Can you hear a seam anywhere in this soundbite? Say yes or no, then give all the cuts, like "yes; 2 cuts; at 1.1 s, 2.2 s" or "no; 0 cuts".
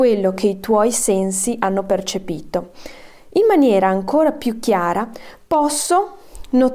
no; 0 cuts